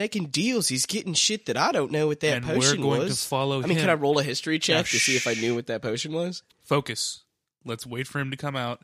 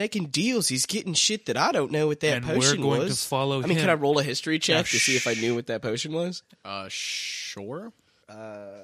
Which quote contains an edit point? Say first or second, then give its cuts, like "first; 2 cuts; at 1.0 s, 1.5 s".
first; 1 cut; at 6.5 s